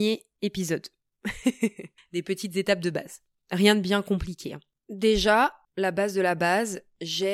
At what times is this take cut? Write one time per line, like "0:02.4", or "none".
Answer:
none